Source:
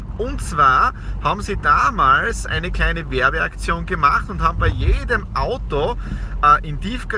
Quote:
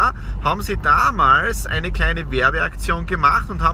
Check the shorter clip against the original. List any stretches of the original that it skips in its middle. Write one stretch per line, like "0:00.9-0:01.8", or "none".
none